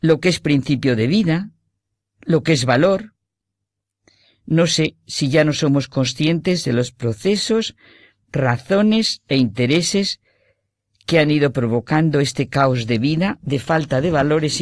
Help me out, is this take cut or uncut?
uncut